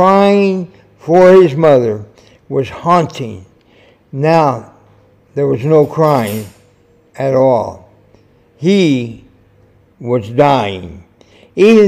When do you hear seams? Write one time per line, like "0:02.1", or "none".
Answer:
none